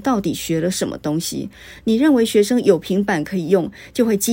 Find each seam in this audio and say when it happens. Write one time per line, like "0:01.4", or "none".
none